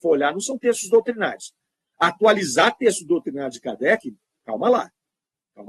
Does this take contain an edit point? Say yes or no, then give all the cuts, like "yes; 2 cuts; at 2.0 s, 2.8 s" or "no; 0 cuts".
no; 0 cuts